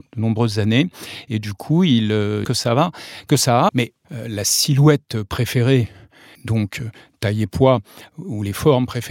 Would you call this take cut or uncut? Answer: cut